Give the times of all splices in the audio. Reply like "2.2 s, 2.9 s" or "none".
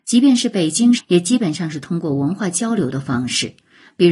1.0 s